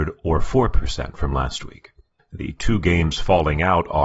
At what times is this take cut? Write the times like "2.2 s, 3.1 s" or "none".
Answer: 2.2 s